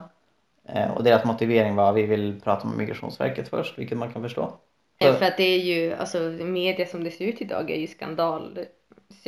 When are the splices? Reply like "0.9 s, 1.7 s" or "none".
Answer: 5.0 s